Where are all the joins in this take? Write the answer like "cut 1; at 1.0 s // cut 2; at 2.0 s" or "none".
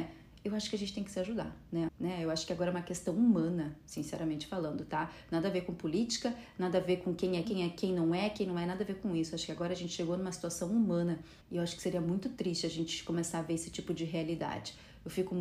cut 1; at 1.9 s // cut 2; at 7.4 s // cut 3; at 11.4 s